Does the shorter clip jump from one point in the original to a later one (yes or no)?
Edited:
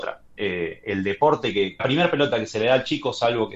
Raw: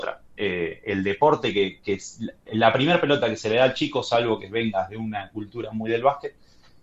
yes